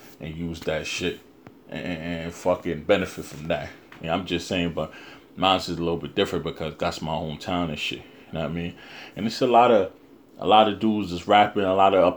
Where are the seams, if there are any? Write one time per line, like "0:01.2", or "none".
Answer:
0:04.0